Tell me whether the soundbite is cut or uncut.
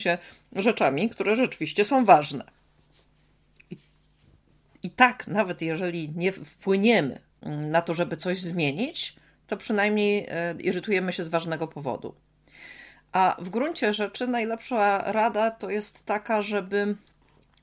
cut